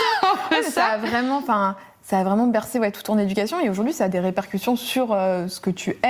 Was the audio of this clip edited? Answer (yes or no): no